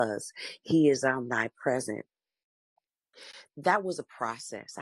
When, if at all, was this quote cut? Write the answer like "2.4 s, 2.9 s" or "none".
3.5 s